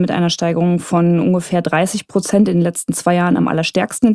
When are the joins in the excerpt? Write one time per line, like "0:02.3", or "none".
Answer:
none